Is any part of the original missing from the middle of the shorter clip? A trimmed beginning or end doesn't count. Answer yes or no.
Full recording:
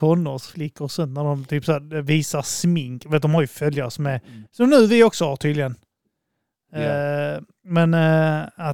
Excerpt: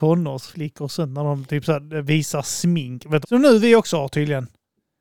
yes